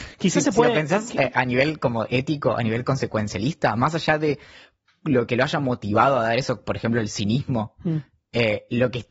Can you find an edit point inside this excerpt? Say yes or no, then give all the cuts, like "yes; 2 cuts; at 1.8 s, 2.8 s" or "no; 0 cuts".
no; 0 cuts